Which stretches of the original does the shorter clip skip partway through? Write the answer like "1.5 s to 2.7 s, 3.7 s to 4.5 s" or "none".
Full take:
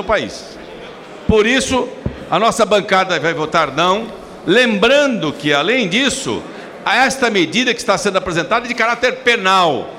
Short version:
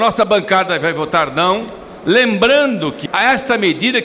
5.5 s to 6.8 s